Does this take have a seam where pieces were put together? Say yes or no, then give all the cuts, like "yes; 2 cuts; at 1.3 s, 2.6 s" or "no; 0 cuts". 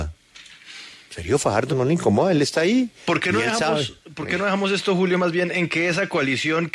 yes; 1 cut; at 1.7 s